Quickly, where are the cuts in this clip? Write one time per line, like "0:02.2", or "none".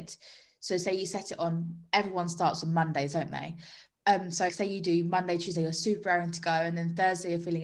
0:04.5
0:05.5